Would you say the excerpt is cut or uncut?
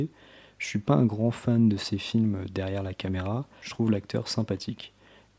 cut